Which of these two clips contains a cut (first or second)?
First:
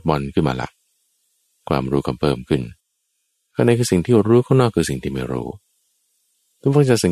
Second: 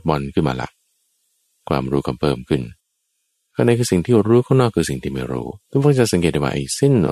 second